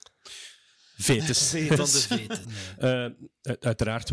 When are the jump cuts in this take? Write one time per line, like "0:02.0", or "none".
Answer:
0:02.4